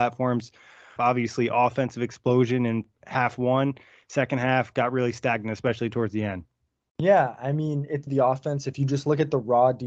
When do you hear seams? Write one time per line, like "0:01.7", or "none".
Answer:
0:01.0
0:08.1